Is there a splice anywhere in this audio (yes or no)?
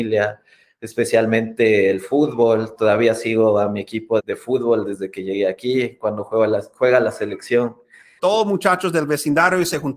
yes